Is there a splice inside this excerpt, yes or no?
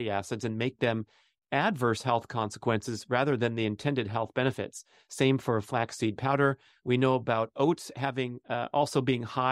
no